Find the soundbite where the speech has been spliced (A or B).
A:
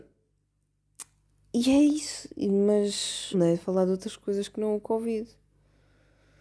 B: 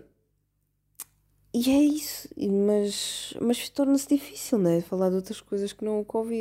A